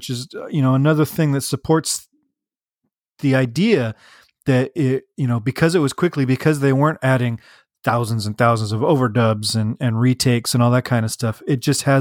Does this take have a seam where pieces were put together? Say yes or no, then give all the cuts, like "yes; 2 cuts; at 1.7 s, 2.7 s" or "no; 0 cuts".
no; 0 cuts